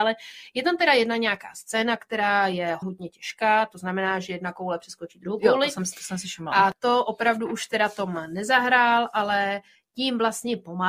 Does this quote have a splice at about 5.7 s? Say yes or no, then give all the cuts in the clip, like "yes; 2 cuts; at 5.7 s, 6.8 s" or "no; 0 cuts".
no; 1 cut; at 2.8 s